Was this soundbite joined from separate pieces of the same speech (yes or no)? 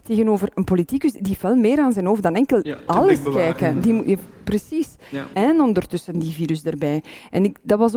yes